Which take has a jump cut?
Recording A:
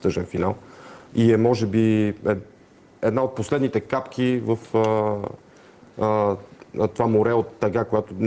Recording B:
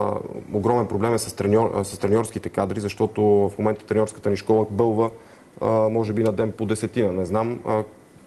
B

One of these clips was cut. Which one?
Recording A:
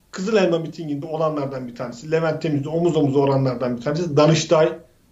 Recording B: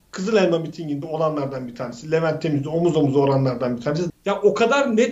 B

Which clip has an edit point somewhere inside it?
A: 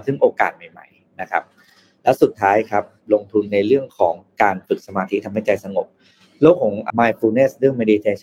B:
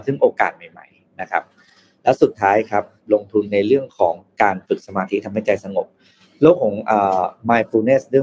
A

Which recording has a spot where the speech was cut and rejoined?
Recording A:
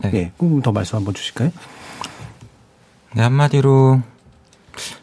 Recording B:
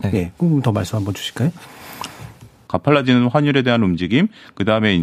B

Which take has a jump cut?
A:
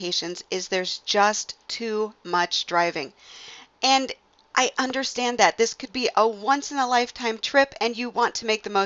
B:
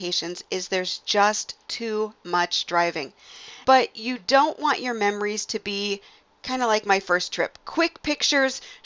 B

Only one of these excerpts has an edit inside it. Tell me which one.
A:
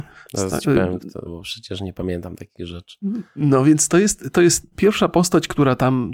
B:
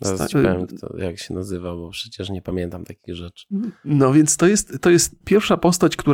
A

